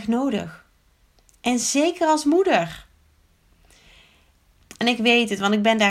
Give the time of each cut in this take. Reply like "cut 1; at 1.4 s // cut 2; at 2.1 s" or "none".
cut 1; at 4.6 s